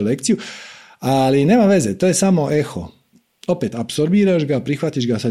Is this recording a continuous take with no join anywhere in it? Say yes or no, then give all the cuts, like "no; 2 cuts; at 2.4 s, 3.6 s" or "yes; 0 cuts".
yes; 0 cuts